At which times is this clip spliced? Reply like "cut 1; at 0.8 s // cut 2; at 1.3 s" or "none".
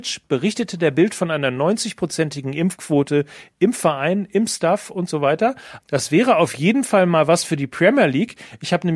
cut 1; at 5.8 s